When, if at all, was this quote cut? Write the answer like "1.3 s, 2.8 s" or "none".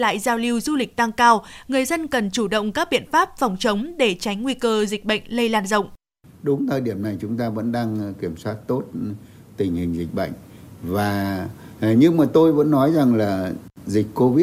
none